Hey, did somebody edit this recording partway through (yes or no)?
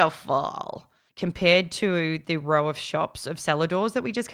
yes